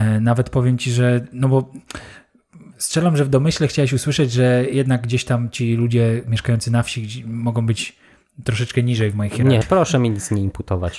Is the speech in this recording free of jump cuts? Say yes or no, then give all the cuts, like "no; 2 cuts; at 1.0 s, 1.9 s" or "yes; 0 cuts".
no; 1 cut; at 9.6 s